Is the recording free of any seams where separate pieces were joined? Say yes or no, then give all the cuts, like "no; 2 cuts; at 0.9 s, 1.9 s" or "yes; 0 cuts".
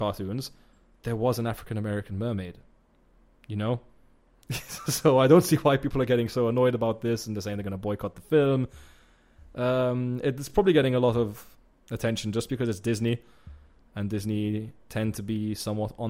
yes; 0 cuts